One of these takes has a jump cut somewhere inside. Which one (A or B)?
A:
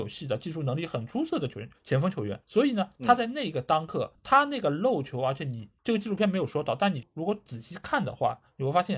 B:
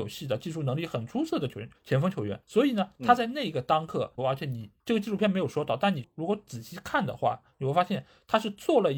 B